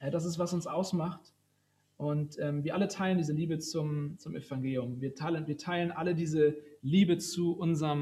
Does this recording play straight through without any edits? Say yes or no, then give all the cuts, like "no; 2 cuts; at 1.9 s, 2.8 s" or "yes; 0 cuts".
yes; 0 cuts